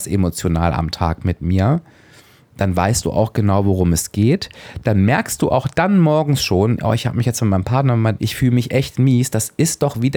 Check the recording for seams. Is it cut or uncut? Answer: cut